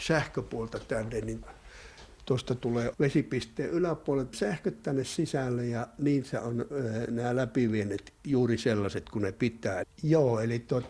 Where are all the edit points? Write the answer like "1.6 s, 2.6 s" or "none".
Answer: 9.8 s